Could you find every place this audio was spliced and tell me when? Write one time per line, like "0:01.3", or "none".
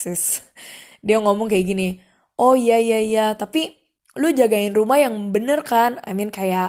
none